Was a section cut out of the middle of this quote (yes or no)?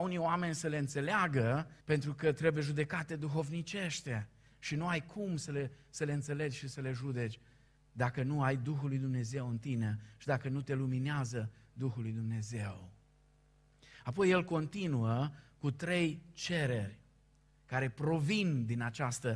yes